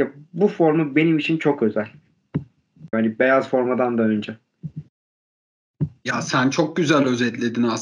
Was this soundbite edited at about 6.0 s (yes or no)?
no